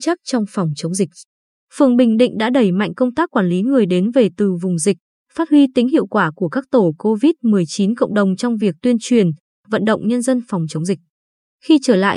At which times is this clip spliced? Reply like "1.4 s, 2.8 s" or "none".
1.6 s